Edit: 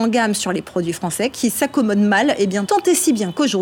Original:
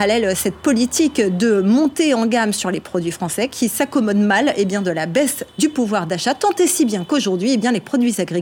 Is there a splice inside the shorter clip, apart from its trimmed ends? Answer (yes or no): yes